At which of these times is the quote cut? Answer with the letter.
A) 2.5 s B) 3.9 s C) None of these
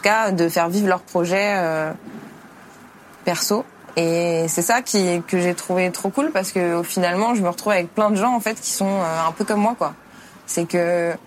C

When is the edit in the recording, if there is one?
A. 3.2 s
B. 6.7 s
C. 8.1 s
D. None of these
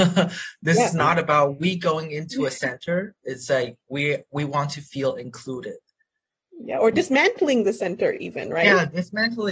D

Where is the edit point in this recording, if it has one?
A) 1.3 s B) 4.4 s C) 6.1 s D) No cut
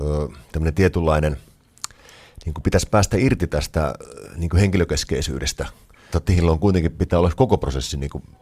C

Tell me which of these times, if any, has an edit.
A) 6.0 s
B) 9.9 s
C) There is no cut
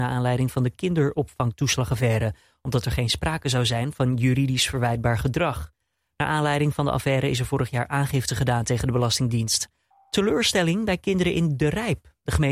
B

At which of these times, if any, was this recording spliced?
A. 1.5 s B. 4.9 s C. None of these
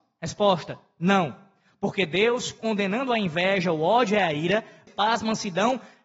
B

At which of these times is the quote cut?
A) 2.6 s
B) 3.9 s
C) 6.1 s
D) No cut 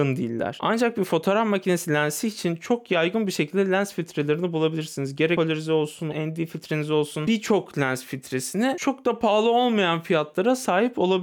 C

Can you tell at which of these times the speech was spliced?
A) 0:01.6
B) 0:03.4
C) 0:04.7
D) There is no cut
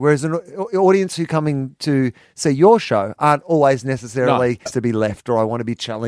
C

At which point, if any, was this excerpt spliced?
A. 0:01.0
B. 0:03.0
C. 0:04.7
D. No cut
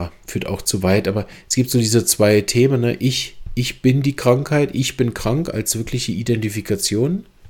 D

